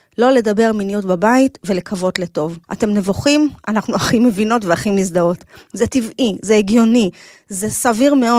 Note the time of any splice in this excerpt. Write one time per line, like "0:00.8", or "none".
0:02.6